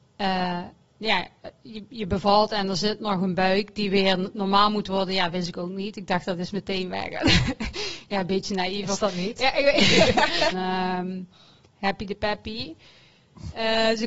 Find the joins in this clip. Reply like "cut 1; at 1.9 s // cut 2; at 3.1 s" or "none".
cut 1; at 10.5 s